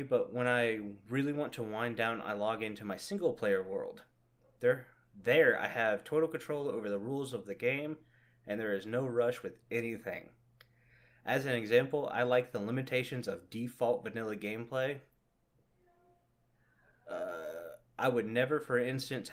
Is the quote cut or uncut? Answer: uncut